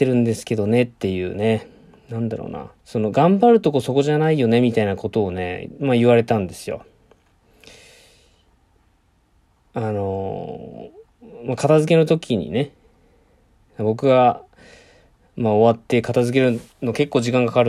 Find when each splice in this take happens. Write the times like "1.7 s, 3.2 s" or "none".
2.8 s